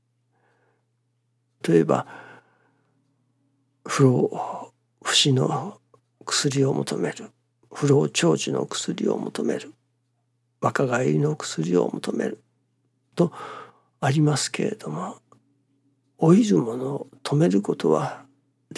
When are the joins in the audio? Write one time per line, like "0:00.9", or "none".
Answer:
0:01.6